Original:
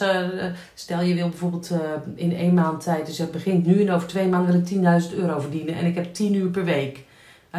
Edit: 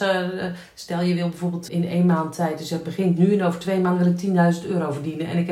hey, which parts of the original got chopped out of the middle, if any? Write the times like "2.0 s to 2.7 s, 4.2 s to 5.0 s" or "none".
1.7 s to 2.2 s

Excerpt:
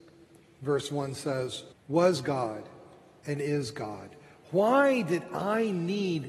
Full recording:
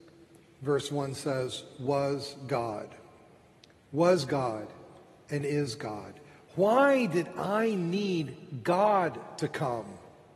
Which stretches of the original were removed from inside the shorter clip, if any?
1.7 s to 3.8 s

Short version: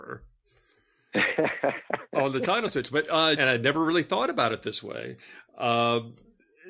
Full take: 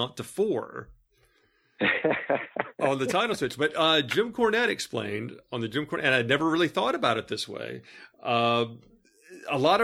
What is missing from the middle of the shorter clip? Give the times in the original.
4.0 s to 6.0 s

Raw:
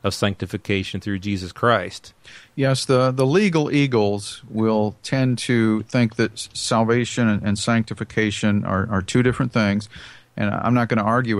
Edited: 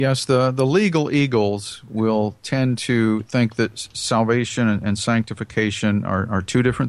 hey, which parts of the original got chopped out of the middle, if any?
none

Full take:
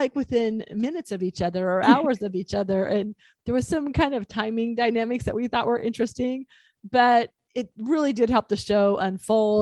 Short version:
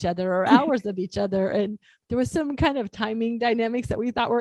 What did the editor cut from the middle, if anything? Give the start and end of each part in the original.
none

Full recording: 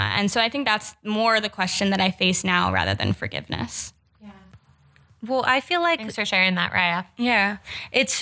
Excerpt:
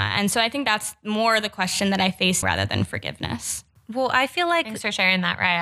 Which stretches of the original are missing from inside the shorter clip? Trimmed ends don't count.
2.4 s to 2.7 s, 4.0 s to 5.1 s

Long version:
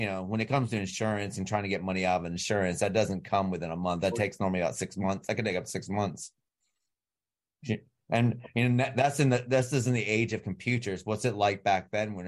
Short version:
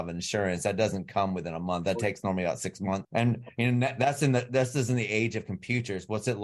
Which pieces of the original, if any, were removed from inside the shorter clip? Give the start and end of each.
5.2 s to 8.0 s

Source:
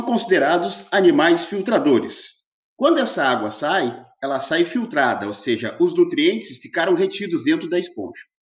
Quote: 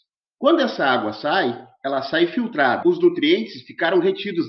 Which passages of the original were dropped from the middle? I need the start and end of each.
5.2 s to 5.8 s

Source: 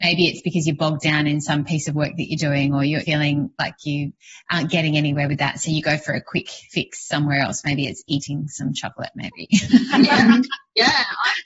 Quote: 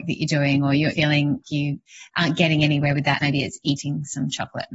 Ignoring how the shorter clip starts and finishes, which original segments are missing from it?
3.5 s to 3.8 s, 5.5 s to 7.6 s

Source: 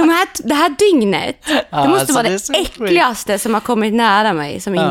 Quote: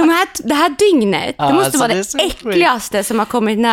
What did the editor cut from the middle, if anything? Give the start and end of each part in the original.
1.4 s to 1.7 s

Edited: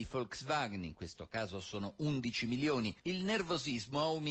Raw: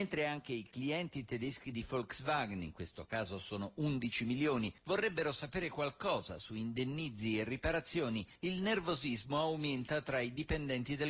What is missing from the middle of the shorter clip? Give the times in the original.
4.8 s to 8.4 s

